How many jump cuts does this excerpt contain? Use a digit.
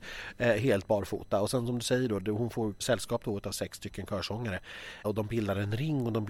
2